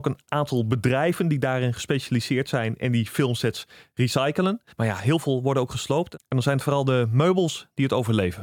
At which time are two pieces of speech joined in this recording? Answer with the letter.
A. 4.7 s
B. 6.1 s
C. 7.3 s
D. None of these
A